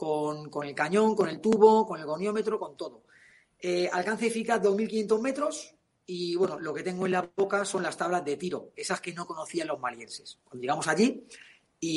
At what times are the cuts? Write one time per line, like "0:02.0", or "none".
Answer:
none